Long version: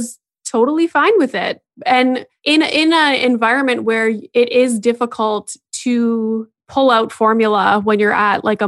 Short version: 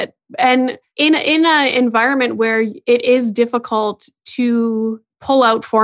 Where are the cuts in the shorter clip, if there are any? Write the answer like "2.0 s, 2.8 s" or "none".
none